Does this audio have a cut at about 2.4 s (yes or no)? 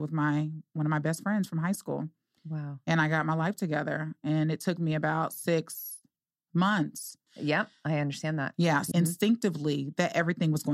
no